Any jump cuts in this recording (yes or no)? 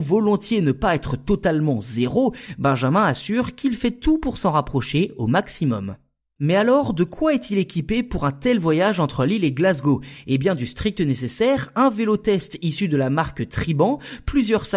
no